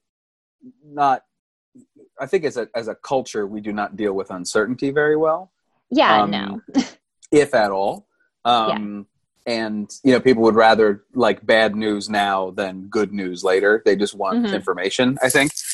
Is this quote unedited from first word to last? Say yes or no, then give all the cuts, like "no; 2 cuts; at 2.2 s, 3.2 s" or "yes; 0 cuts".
yes; 0 cuts